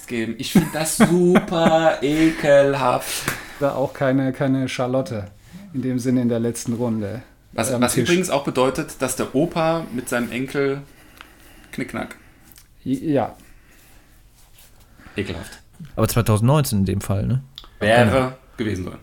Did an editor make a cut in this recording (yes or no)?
yes